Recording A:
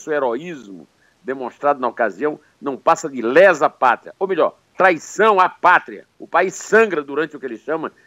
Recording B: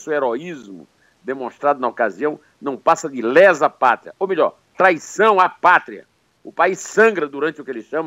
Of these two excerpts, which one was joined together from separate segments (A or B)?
A